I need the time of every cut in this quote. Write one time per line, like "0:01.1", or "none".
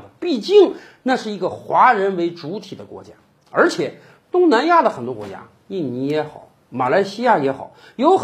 none